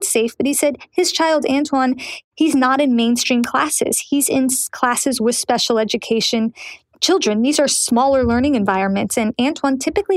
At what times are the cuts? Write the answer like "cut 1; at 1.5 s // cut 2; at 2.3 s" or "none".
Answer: none